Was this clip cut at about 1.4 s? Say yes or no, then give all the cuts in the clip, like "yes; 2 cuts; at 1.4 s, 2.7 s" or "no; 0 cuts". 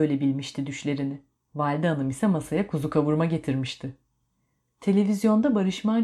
yes; 1 cut; at 1.4 s